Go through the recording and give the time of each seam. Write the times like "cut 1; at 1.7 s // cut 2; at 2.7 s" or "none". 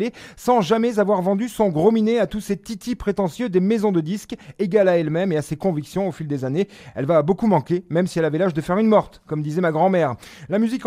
none